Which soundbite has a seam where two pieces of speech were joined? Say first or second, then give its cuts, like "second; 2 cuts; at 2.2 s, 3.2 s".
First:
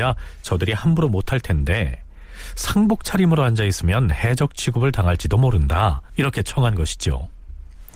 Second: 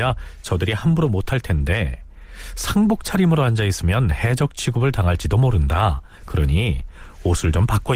first; 1 cut; at 6.1 s